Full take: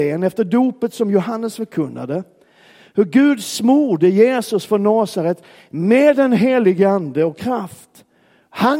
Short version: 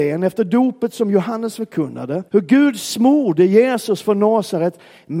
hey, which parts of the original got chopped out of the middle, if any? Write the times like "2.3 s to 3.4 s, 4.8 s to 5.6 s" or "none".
2.3 s to 2.9 s